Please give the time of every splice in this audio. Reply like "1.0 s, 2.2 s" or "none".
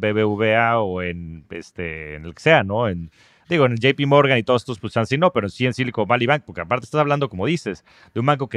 none

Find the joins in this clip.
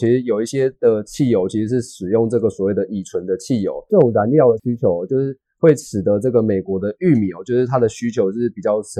none

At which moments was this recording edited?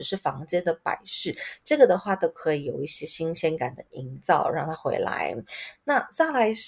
none

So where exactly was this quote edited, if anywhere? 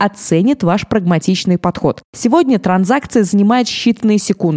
2.0 s

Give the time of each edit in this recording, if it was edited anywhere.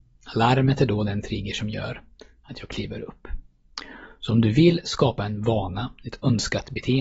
none

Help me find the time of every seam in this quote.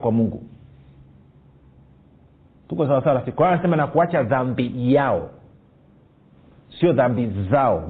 none

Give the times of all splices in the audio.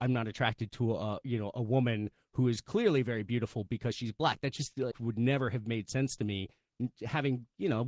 4.9 s

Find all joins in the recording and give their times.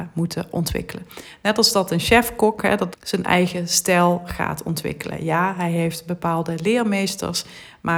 2.9 s

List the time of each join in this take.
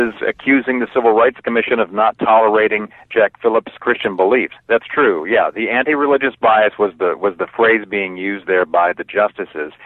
4.5 s

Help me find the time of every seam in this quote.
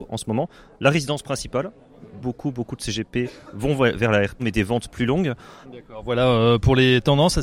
2.2 s, 4.4 s, 5.6 s

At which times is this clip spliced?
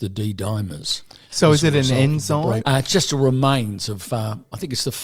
2.6 s

